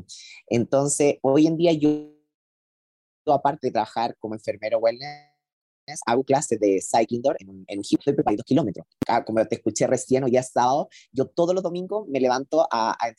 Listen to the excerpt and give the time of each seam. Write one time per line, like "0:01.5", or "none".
none